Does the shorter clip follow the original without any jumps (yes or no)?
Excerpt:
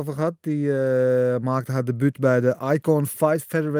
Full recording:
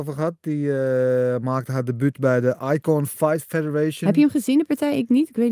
yes